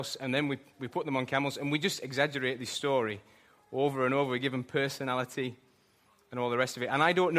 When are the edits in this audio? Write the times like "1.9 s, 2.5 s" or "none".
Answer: none